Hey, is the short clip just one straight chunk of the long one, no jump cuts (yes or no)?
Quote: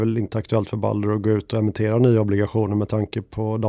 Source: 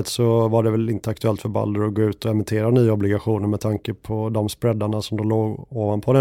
yes